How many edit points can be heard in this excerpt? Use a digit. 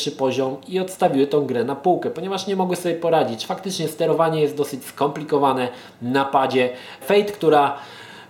1